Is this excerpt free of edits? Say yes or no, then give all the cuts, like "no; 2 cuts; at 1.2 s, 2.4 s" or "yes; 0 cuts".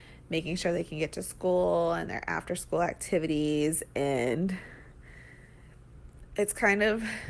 yes; 0 cuts